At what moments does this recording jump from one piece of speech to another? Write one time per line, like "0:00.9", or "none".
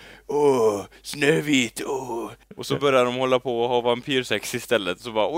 0:02.4